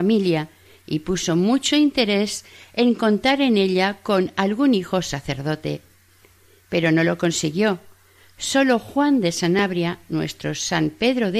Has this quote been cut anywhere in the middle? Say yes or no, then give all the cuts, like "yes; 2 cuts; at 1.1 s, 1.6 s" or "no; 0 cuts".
no; 0 cuts